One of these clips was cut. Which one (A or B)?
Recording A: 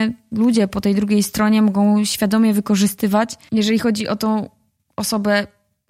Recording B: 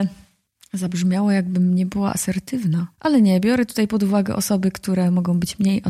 B